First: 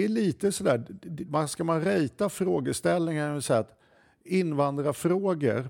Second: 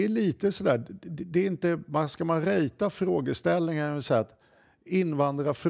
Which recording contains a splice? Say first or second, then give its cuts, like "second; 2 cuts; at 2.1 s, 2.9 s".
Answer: first; 1 cut; at 1.2 s